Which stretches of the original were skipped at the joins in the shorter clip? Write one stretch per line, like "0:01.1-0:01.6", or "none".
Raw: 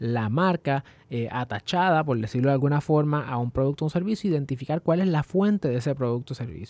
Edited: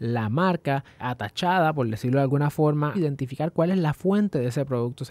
0:01.0-0:01.3
0:03.2-0:04.2

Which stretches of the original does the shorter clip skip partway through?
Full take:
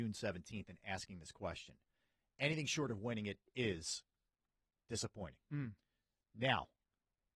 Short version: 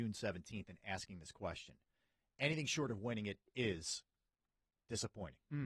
none

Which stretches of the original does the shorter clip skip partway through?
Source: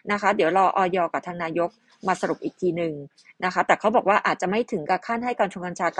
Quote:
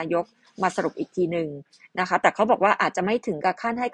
none

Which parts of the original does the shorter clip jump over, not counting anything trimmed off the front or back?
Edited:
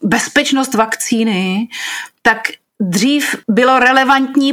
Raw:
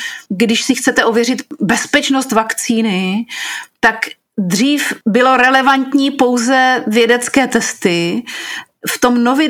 none

